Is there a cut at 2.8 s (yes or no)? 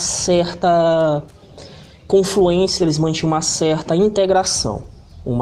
no